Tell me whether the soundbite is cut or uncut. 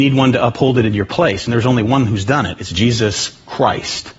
uncut